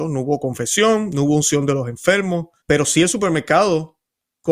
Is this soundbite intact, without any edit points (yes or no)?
no